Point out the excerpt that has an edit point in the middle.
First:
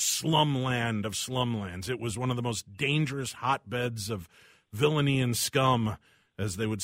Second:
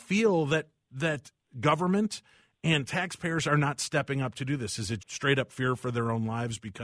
second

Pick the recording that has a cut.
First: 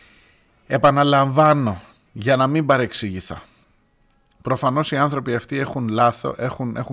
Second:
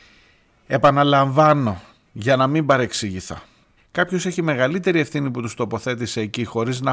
second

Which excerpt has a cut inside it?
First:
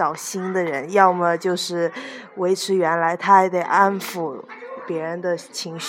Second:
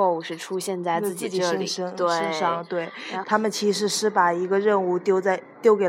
second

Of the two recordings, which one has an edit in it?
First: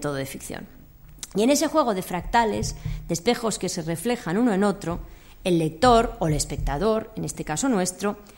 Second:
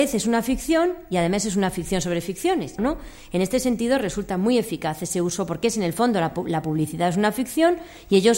second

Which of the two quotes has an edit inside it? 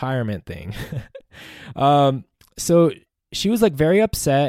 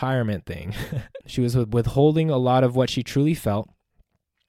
second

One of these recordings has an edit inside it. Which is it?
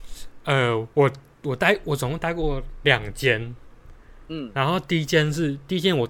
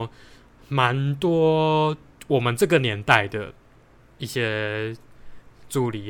first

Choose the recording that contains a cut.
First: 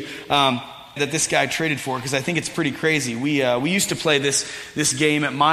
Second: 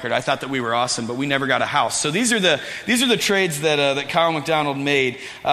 first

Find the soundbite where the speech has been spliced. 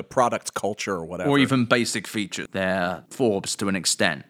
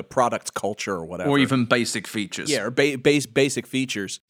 first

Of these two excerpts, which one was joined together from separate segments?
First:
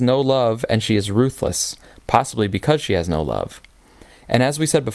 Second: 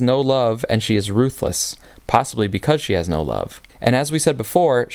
second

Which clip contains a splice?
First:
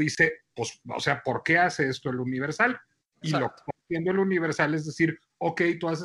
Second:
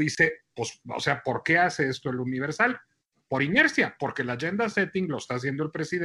first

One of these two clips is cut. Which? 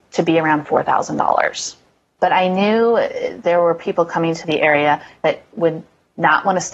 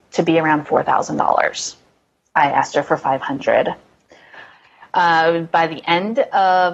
first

